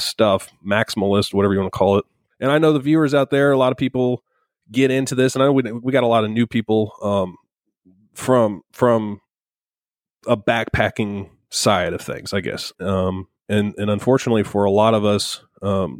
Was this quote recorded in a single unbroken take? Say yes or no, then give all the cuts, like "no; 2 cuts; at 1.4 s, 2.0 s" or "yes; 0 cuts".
no; 2 cuts; at 2.3 s, 12.7 s